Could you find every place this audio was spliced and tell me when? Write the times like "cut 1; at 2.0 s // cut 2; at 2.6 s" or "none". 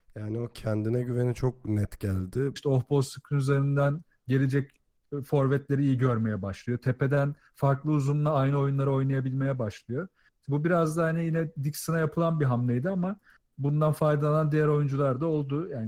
cut 1; at 2.6 s